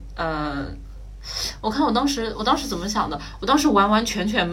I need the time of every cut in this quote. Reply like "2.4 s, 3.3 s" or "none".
none